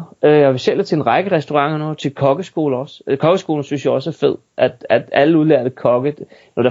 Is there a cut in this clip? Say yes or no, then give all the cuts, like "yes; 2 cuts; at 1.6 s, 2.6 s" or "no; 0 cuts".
no; 0 cuts